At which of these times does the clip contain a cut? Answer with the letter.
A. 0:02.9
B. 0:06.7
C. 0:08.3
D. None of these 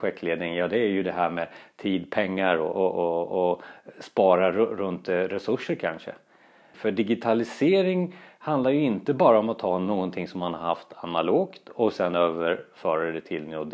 B